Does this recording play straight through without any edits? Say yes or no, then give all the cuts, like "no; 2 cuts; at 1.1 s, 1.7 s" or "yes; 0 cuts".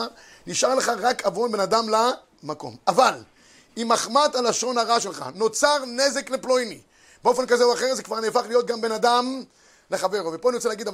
yes; 0 cuts